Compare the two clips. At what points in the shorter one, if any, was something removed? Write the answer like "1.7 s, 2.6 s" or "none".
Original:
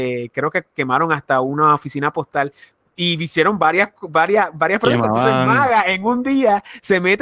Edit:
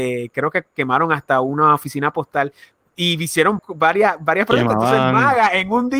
3.6 s